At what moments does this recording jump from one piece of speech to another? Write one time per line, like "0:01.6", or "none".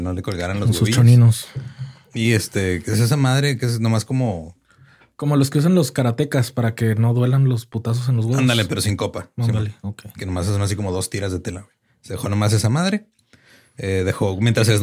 none